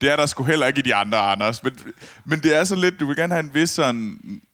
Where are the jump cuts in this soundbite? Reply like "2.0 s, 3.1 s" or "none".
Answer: 1.6 s, 3.0 s